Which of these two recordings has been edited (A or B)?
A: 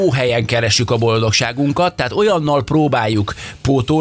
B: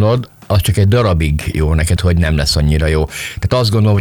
B